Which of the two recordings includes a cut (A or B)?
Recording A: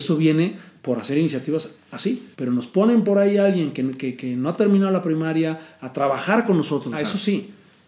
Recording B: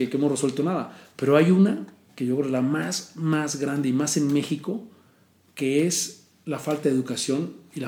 A